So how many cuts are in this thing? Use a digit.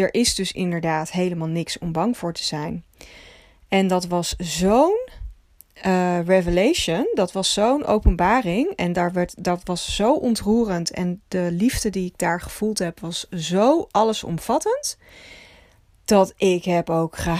0